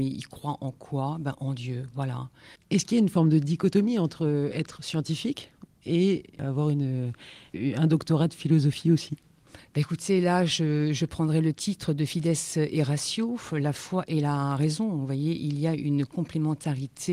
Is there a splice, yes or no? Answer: yes